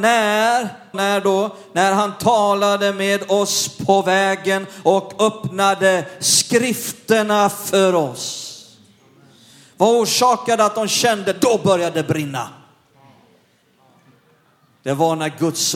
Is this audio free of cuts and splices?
no; 1 cut; at 0.9 s

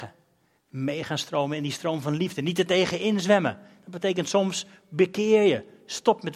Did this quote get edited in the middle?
no; 0 cuts

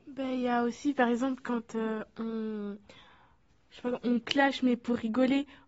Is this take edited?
no; 0 cuts

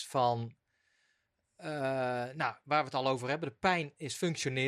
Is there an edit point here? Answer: no; 0 cuts

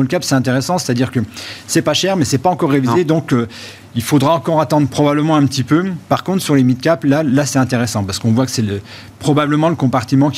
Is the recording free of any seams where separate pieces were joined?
yes; 0 cuts

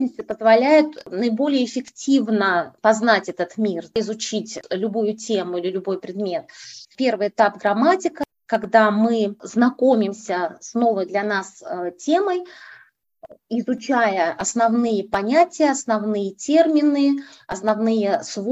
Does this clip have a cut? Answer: yes; 1 cut; at 6.8 s

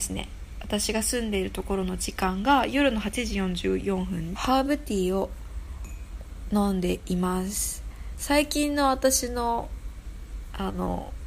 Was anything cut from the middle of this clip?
yes; 1 cut; at 4.3 s

